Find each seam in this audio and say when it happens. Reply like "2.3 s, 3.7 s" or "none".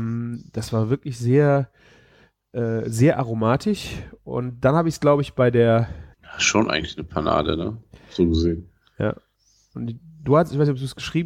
6.1 s

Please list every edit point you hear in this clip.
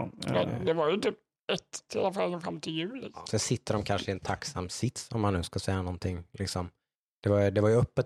1.9 s, 3.2 s

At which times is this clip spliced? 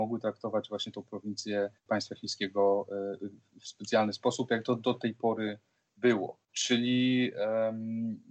1.8 s, 6.5 s

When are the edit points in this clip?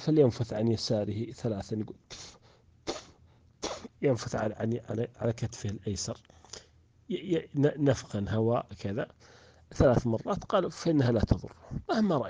none

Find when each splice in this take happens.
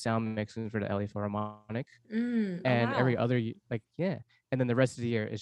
none

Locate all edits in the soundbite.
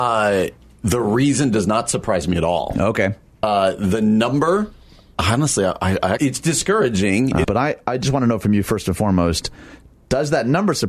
6.2 s, 7.4 s

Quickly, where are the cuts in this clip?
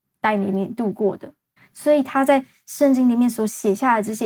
1.6 s

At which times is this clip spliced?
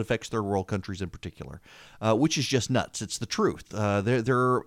none

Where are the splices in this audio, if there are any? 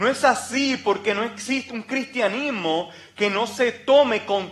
1.7 s

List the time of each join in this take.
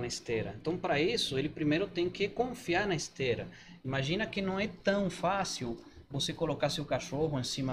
none

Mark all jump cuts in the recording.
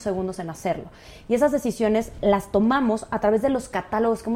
none

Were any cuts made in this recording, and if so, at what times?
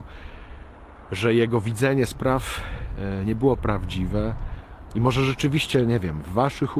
4.9 s

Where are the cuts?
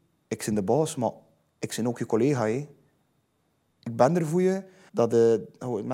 4.9 s

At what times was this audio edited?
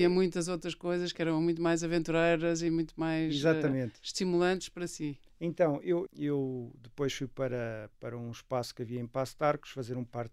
6.1 s

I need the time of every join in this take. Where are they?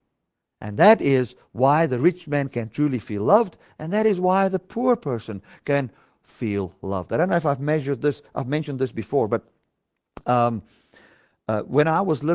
6.1 s

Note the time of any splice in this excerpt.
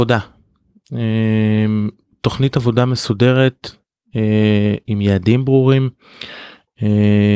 none

